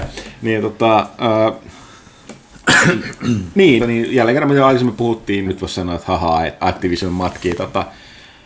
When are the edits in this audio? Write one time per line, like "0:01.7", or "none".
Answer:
0:03.8
0:05.5
0:06.6